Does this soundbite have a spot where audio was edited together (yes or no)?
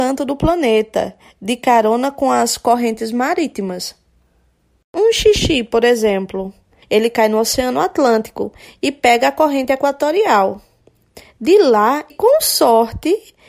yes